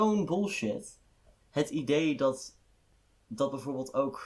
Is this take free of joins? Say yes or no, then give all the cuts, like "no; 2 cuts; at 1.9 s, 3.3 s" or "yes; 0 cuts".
yes; 0 cuts